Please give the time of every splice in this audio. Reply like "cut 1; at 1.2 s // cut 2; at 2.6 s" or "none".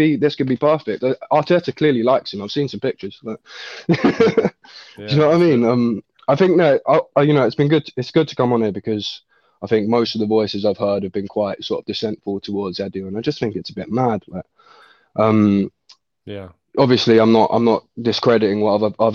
none